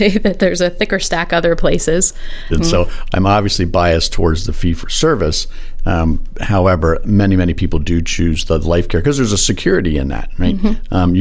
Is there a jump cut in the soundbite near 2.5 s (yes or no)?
yes